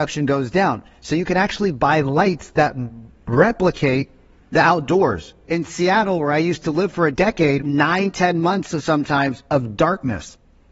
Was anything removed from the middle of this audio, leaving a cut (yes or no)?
yes